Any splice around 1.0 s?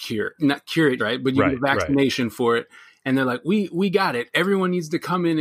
yes; 1 cut; at 1.0 s

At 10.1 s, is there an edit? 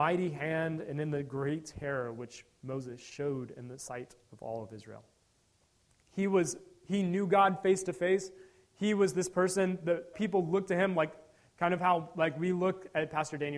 yes; 2 cuts; at 6.0 s, 10.1 s

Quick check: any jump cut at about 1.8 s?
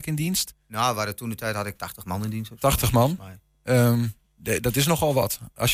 yes; 1 cut; at 1.8 s

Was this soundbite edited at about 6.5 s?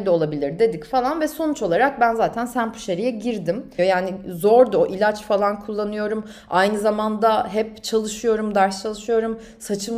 no; 1 cut; at 3.8 s

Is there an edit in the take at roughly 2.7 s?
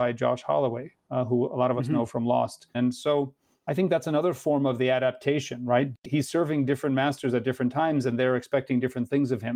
yes; 1 cut; at 2.7 s

